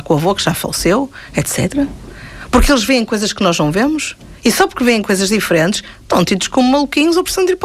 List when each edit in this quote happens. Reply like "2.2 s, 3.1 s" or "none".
none